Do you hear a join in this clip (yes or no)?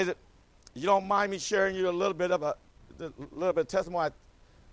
no